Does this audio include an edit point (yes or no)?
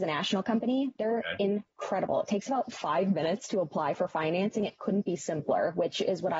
no